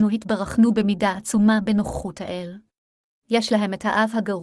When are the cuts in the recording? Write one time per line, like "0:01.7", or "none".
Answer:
0:03.2